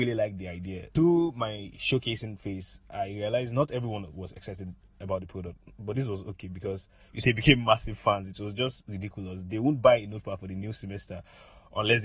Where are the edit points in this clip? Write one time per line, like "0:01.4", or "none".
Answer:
0:00.9
0:07.2